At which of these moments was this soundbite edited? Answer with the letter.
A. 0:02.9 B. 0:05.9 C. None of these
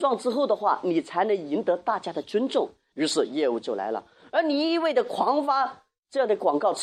A